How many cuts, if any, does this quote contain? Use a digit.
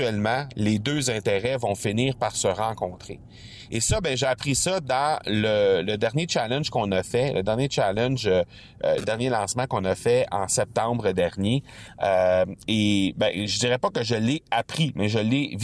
0